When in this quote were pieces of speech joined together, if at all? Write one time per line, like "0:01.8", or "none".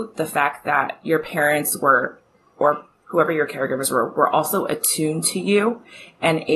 none